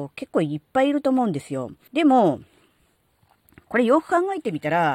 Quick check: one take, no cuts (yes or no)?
no